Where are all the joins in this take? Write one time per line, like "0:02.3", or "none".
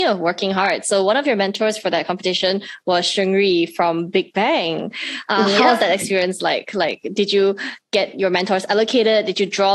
none